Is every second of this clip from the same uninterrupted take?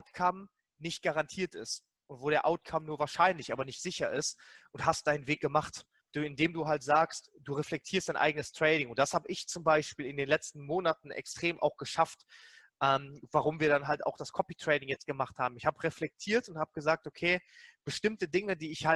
no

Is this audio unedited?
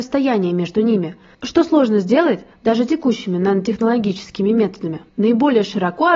no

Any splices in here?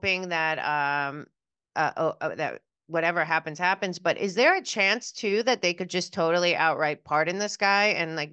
no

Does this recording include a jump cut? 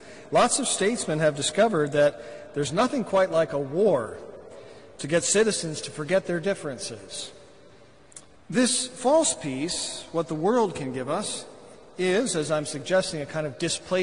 yes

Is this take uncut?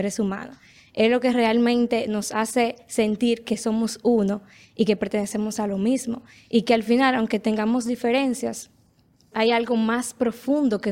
no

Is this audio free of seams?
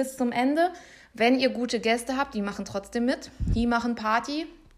yes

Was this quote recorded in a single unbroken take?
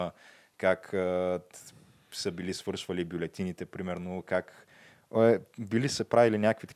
yes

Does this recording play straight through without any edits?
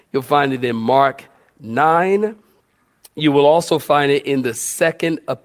yes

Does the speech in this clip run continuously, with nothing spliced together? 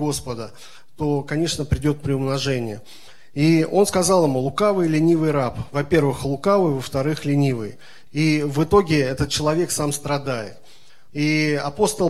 no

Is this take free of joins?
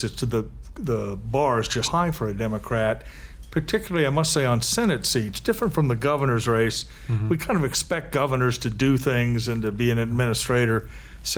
no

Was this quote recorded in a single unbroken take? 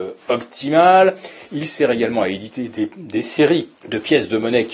no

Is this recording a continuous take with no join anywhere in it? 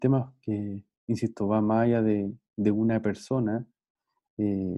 yes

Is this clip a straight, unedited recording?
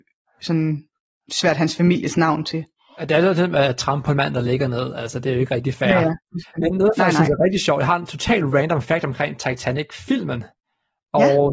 yes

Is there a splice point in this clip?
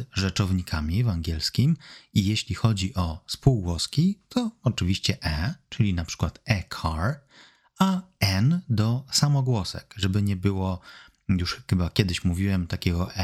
no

